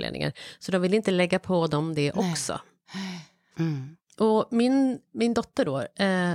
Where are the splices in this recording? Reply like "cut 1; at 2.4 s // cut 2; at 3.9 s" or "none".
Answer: cut 1; at 3.5 s // cut 2; at 5.1 s

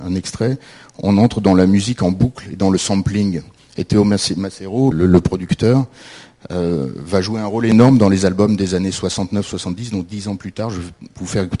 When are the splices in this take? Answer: cut 1; at 4.9 s

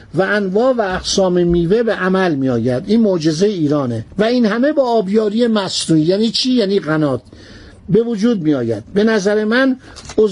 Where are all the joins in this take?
cut 1; at 4.1 s

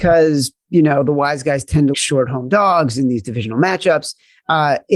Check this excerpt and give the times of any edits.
cut 1; at 1.9 s

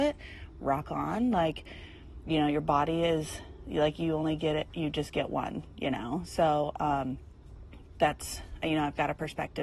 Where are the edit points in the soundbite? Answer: none

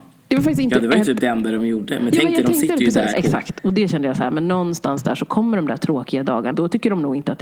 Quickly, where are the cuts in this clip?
cut 1; at 3.1 s // cut 2; at 6.5 s

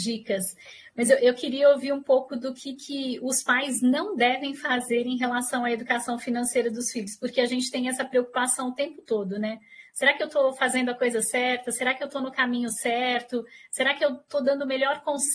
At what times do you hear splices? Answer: none

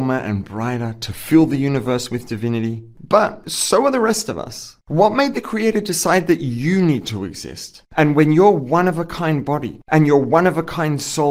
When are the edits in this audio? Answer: cut 1; at 2.9 s // cut 2; at 7.8 s

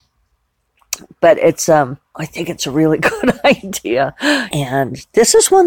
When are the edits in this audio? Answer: cut 1; at 2.0 s // cut 2; at 4.5 s

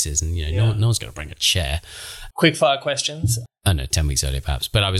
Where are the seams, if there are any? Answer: cut 1; at 2.3 s // cut 2; at 3.5 s

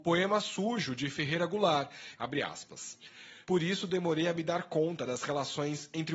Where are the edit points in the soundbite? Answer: cut 1; at 2.1 s // cut 2; at 3.4 s

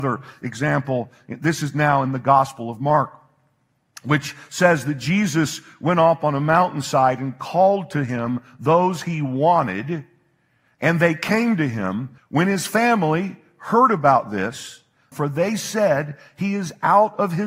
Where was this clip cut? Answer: cut 1; at 12.2 s // cut 2; at 15.1 s

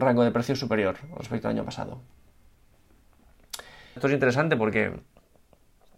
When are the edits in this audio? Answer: cut 1; at 4.0 s

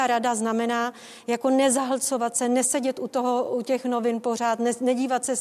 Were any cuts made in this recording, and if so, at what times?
none

